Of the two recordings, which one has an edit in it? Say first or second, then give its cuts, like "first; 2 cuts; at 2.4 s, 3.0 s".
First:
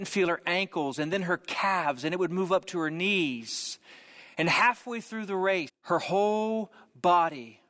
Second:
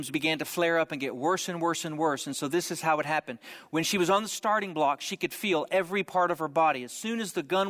first; 1 cut; at 5.7 s